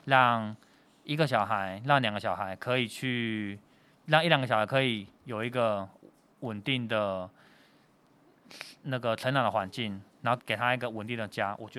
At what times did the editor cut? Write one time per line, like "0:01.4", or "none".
0:10.4